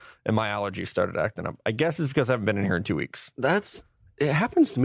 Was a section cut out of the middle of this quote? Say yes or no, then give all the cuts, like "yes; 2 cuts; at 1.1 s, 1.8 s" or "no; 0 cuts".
no; 0 cuts